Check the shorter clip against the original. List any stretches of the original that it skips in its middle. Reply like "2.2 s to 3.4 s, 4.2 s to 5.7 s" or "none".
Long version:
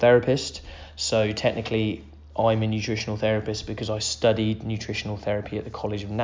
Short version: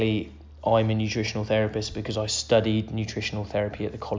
none